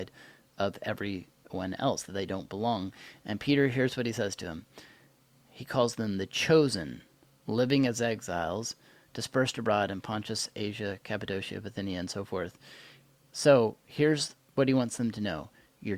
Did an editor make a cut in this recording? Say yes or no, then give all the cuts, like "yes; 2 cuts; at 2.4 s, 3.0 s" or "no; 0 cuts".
no; 0 cuts